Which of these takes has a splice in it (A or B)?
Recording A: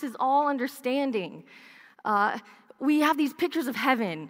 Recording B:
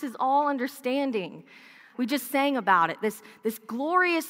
B